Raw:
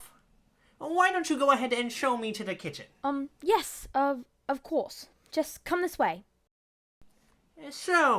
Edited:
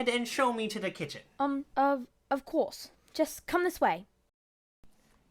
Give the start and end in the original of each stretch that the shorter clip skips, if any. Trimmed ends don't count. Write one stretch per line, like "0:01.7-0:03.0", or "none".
0:03.4-0:03.9